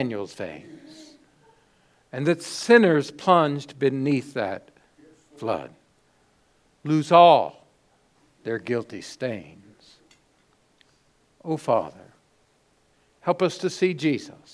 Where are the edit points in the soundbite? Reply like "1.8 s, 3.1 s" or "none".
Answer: none

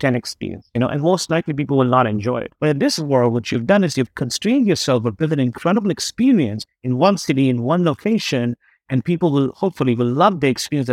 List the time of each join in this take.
none

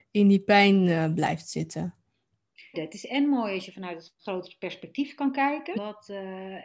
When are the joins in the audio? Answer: 2.7 s, 5.7 s

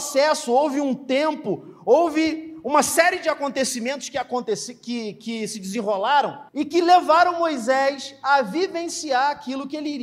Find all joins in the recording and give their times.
6.5 s

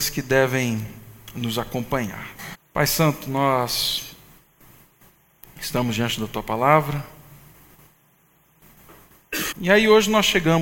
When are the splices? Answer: 2.5 s, 9.5 s

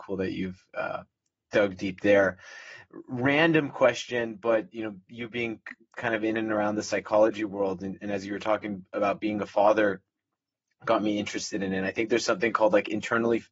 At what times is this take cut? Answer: none

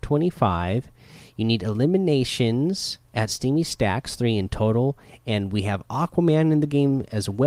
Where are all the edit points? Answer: 3.0 s

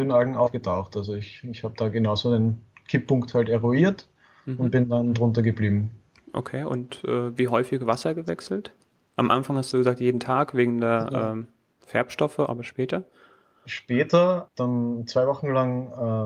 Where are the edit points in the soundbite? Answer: 14.5 s

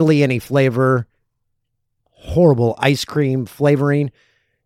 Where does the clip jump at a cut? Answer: 2.0 s

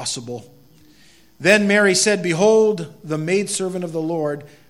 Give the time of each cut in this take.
none

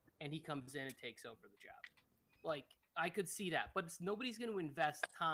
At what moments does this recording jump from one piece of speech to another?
none

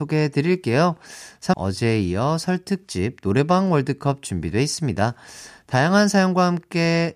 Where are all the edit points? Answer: 1.5 s

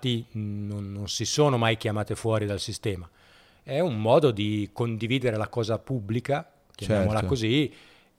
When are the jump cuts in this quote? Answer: none

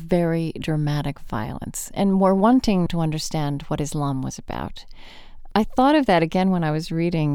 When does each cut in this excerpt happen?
2.9 s, 5.5 s

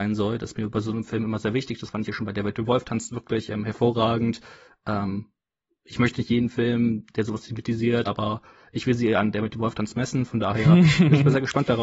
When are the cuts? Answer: 8.0 s

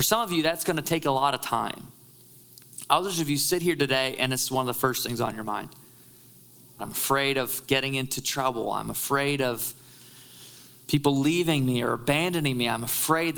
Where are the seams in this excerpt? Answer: 6.8 s

